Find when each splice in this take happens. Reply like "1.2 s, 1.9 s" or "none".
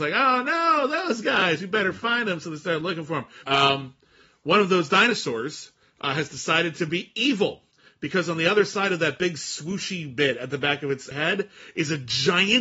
3.4 s, 11.1 s